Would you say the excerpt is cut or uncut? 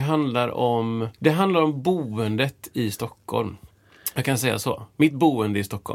cut